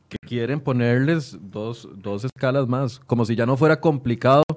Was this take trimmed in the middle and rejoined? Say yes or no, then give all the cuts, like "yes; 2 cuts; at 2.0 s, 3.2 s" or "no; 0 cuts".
no; 0 cuts